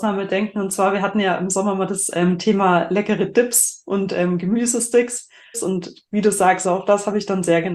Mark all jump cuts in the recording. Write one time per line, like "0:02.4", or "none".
0:05.5
0:06.6

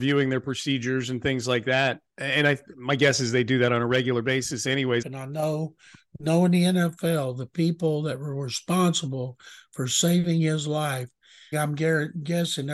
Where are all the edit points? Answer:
0:05.0
0:11.5

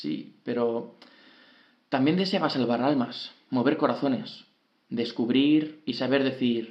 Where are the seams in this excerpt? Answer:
0:04.8

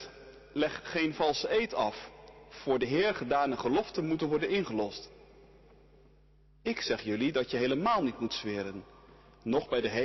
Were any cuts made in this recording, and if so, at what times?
none

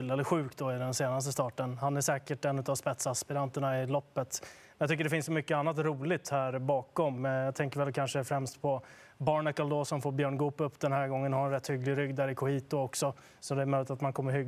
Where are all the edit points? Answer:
none

